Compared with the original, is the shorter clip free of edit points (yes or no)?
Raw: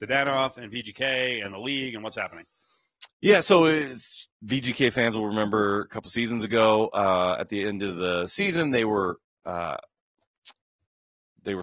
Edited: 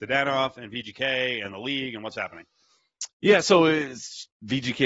yes